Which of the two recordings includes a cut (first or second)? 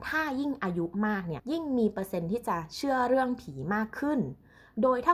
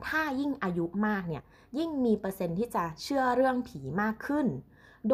first